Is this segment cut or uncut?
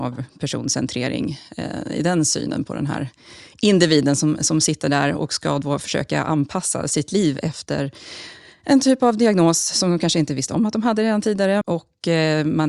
cut